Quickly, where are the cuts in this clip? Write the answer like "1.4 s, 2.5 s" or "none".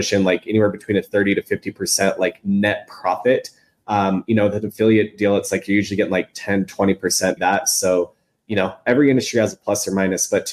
4.3 s, 7.4 s